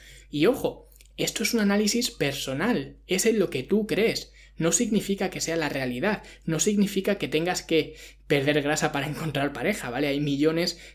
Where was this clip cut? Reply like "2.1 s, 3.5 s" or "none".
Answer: none

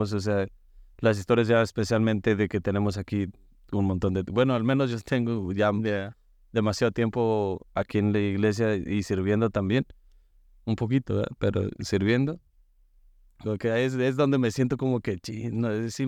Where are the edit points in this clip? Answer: 13.4 s

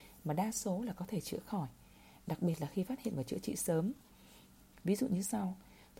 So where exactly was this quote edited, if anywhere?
4.7 s

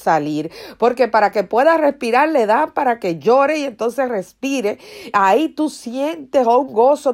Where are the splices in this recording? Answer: none

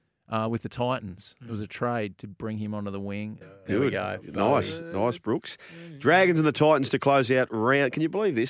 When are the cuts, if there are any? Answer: 3.4 s

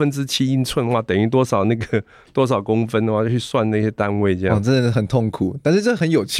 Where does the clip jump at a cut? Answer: none

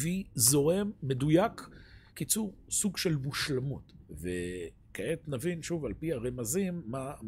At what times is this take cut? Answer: 2.1 s, 4.0 s

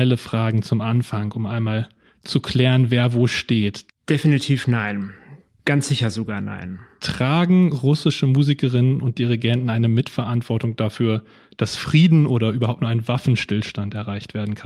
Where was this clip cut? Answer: 3.9 s

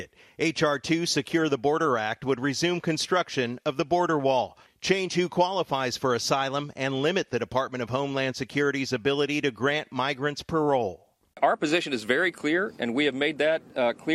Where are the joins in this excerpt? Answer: none

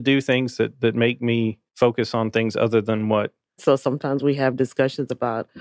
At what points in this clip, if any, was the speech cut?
1.7 s, 3.6 s

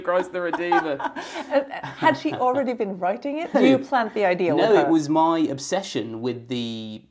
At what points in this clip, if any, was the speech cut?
3.5 s

